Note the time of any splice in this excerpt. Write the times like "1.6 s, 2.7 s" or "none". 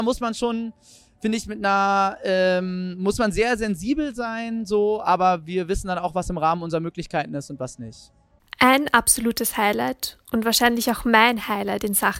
none